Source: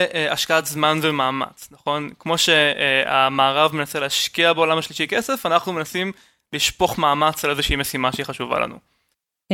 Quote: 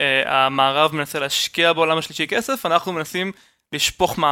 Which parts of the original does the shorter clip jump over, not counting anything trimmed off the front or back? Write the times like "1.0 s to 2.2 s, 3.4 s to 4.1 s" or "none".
none

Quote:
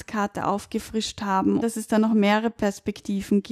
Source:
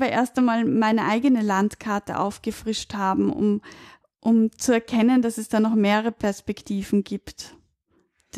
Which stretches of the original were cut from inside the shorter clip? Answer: 3.3 s to 5.2 s

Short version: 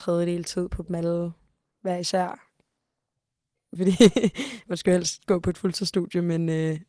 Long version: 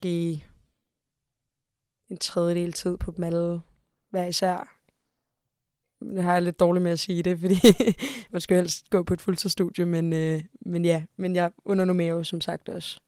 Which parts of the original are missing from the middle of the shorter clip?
6.0 s to 7.4 s

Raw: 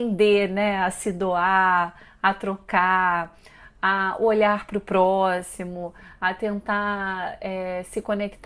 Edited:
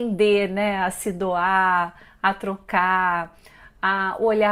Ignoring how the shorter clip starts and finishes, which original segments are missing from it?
none

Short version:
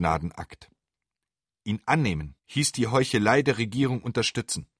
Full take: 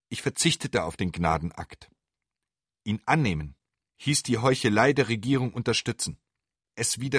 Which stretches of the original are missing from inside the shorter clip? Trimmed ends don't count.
3.6 s to 3.9 s

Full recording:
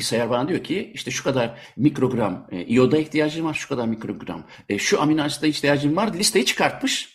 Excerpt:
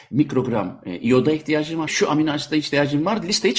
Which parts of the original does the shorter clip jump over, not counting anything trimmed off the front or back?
3.5 s to 4.8 s

